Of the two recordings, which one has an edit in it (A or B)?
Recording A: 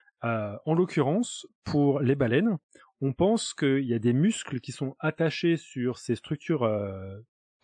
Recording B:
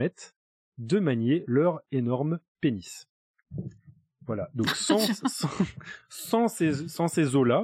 B